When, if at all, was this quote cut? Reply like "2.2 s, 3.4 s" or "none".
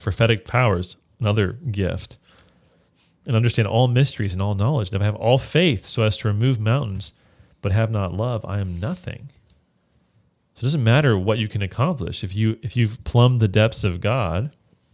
none